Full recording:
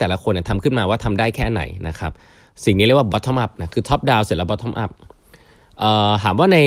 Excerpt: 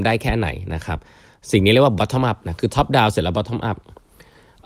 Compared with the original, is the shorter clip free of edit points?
yes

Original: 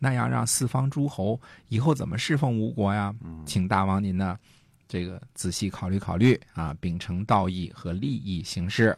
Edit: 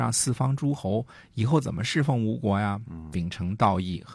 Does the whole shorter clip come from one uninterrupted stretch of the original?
no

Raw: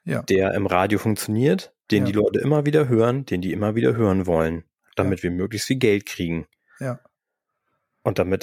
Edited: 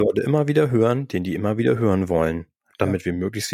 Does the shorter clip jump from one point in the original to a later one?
no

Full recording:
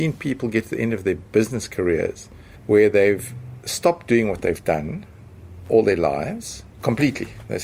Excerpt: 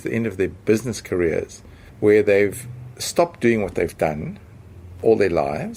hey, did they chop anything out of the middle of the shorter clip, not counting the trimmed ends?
no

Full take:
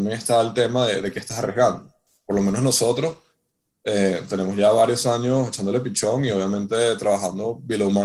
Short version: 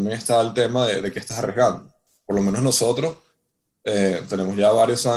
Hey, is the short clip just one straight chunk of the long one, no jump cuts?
yes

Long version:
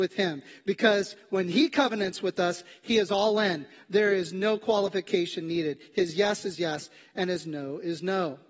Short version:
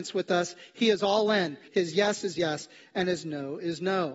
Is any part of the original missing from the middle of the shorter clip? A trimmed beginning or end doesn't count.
yes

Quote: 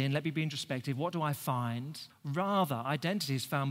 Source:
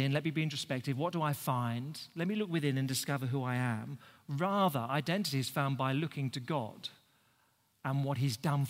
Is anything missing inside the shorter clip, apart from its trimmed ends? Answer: yes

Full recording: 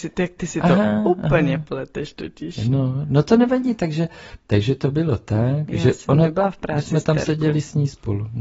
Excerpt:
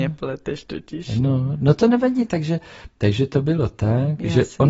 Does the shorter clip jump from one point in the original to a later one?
no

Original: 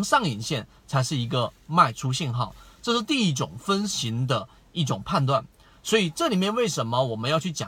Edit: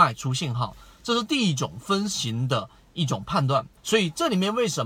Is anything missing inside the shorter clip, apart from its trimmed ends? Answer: yes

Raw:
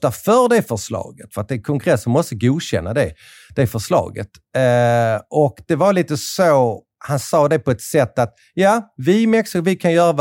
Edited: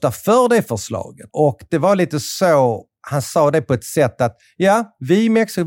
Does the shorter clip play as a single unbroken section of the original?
no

